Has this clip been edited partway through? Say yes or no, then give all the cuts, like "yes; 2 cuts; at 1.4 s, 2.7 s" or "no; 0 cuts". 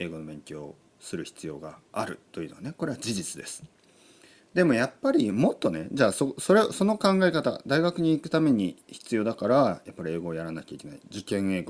no; 0 cuts